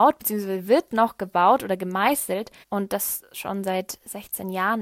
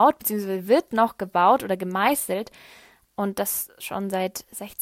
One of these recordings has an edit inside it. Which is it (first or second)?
first